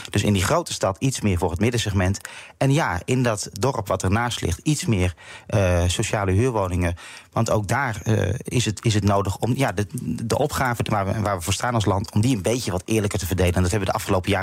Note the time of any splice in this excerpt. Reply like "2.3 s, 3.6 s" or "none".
none

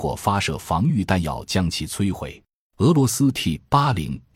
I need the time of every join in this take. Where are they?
2.7 s

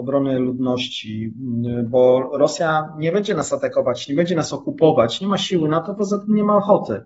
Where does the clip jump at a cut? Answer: none

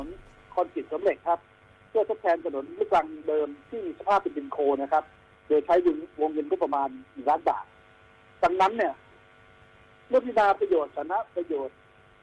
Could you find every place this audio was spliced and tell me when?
4.8 s

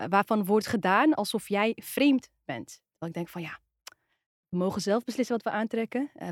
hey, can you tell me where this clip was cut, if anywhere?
none

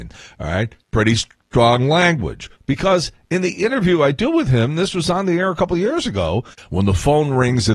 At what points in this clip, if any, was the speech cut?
2.6 s, 6.6 s

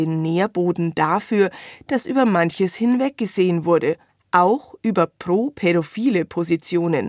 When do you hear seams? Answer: none

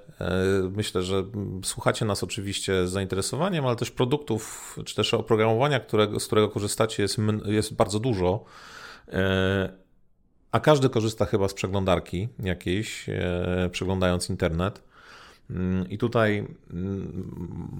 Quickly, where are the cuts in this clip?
none

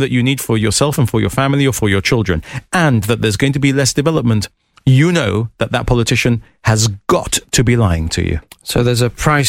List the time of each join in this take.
none

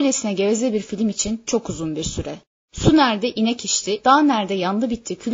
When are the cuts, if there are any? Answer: 4.0 s

